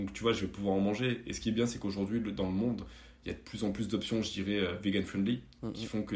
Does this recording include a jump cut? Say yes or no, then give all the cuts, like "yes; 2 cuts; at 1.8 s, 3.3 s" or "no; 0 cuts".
no; 0 cuts